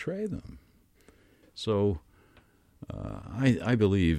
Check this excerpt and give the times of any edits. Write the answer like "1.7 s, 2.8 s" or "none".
1.4 s